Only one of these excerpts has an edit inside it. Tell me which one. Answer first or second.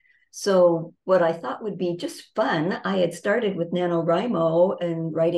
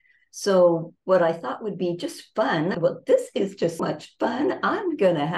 second